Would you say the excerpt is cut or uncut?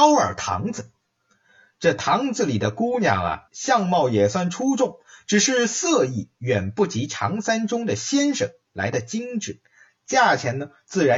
cut